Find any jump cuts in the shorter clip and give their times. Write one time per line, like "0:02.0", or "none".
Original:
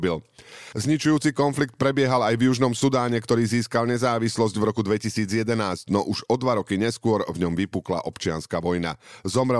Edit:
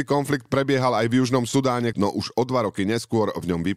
0:01.9